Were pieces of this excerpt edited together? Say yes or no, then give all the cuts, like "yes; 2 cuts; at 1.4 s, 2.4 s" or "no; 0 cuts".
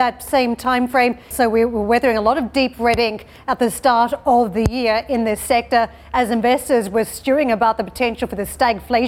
yes; 1 cut; at 1.3 s